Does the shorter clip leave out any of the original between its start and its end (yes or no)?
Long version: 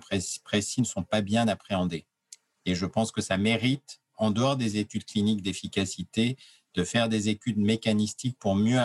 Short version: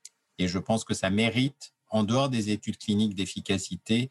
no